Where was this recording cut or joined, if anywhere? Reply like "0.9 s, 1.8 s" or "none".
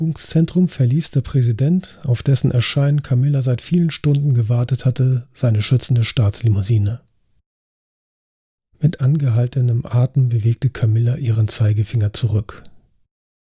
none